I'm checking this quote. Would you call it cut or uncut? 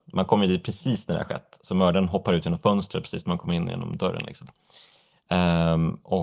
uncut